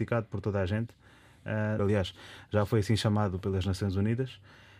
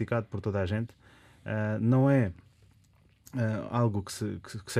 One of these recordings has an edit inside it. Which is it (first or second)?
first